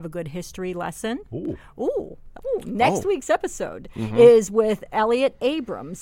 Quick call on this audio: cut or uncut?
uncut